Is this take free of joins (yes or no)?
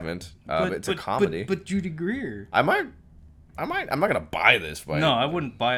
yes